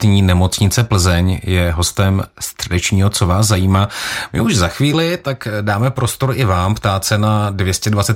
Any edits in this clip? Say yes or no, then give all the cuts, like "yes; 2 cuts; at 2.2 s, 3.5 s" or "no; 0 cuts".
no; 0 cuts